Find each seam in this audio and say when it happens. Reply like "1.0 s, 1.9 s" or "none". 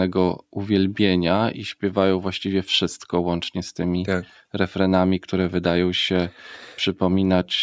1.5 s